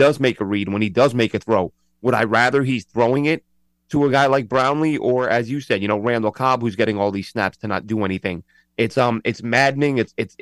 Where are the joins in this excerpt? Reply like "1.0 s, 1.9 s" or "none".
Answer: none

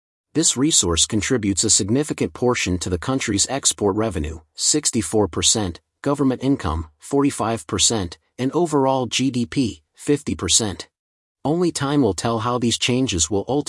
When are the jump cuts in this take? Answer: 11.2 s

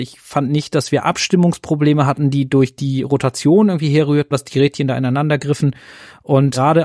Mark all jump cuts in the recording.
4.3 s

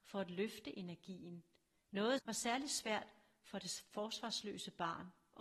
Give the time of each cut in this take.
2.2 s

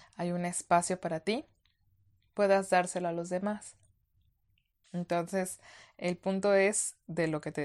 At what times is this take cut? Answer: 4.8 s

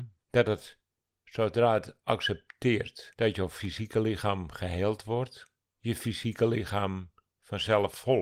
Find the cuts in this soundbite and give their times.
none

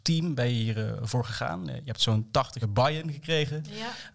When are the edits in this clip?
2.6 s

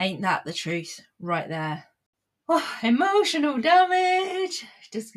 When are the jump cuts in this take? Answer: none

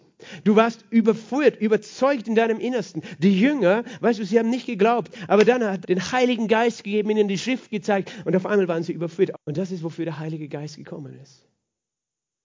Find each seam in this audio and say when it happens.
5.8 s, 9.3 s

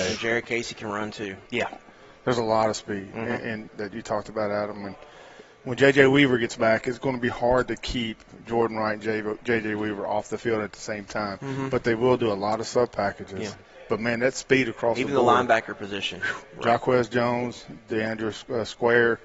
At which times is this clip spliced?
1.5 s, 3.7 s

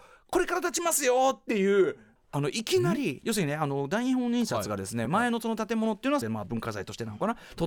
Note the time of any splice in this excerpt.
2.2 s, 5.1 s, 6.2 s

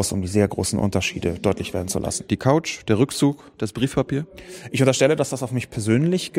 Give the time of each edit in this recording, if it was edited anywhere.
2.3 s

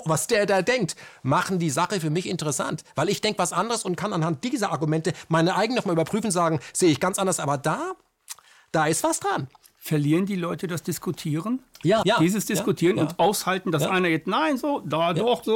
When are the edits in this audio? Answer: 12.0 s

